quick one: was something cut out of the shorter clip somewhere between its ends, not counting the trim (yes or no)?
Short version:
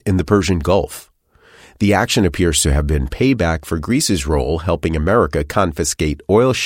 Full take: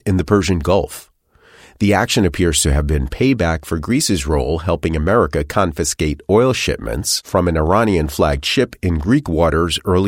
no